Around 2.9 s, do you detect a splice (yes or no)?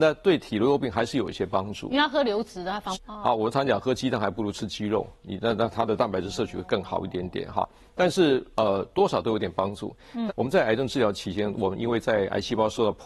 yes